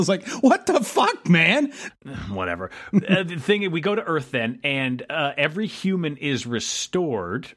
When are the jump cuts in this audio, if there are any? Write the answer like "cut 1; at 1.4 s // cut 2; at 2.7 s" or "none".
cut 1; at 1.9 s